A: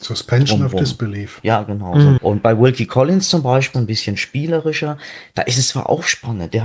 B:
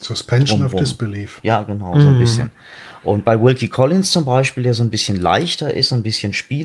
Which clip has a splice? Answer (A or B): A